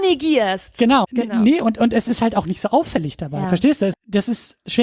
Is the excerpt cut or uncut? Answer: cut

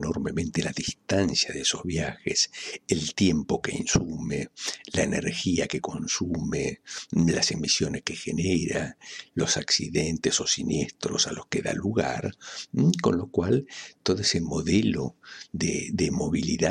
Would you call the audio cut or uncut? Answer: uncut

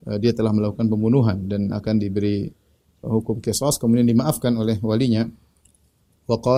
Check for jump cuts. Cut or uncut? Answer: cut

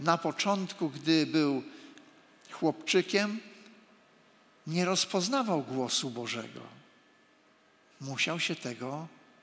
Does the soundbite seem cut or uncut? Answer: uncut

